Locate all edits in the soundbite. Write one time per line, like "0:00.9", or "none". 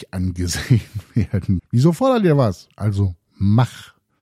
0:01.6
0:02.7